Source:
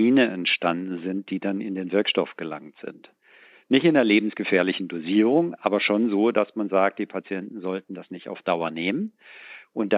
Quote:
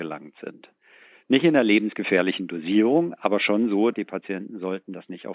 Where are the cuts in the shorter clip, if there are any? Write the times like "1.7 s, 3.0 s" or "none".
3.9 s

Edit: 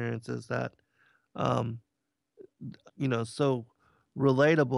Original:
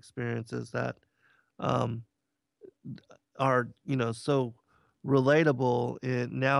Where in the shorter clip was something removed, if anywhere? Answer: 2.9 s

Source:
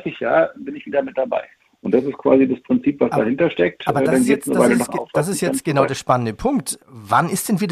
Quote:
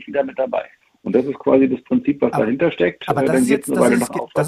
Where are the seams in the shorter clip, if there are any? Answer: none

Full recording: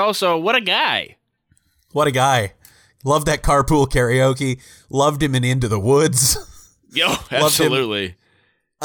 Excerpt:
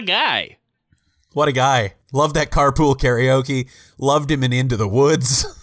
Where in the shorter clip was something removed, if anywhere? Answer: 2.0 s

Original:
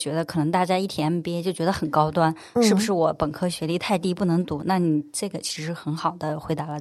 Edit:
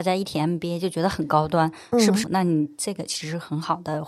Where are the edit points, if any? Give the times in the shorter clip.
2.2 s

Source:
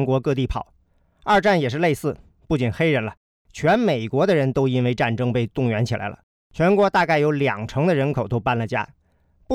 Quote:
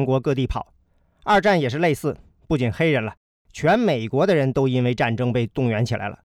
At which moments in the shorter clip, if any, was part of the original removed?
none

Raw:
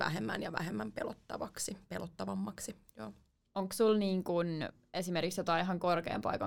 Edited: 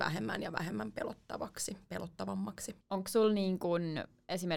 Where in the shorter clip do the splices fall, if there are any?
2.8 s

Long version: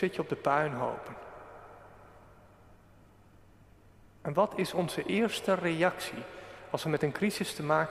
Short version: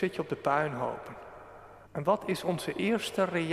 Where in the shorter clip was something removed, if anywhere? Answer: 1.8 s

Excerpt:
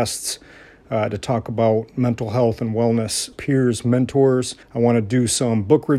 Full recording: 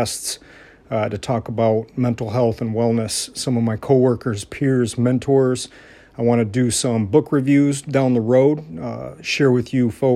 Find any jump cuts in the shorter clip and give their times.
3.3 s, 4.6 s

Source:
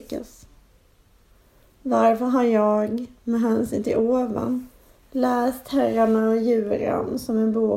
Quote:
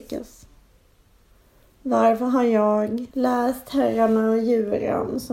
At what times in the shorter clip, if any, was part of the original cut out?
3.1 s

